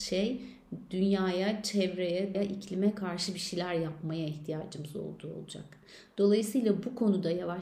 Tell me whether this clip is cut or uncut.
cut